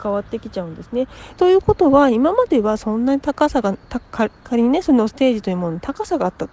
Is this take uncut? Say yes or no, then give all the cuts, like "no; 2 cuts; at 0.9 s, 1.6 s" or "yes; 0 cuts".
no; 1 cut; at 1.4 s